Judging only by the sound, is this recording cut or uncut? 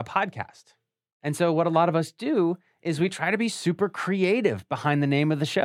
uncut